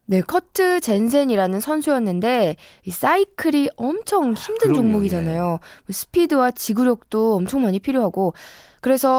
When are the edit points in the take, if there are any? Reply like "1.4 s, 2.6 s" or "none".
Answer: none